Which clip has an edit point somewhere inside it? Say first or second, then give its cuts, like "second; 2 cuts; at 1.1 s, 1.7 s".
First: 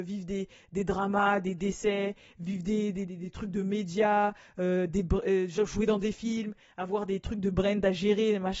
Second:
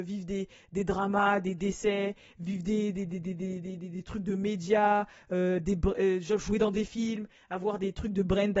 first; 1 cut; at 3.1 s